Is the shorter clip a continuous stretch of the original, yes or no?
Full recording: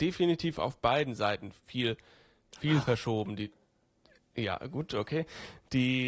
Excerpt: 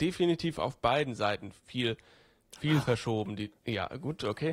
no